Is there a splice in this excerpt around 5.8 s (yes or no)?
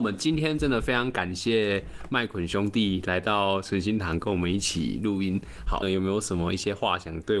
yes